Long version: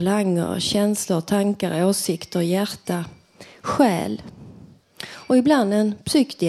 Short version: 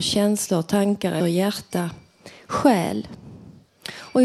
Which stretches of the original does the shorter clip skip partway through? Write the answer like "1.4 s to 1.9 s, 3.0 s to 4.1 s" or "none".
1.8 s to 2.3 s